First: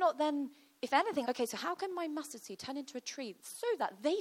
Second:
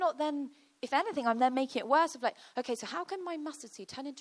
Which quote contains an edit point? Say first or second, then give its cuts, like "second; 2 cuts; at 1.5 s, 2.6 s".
first; 1 cut; at 1.2 s